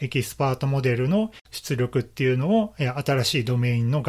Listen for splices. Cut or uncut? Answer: uncut